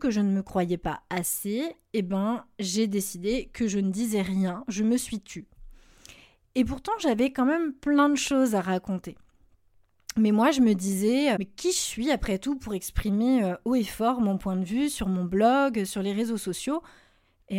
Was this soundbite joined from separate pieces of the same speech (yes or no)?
yes